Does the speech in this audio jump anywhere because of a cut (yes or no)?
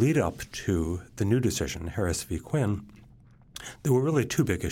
no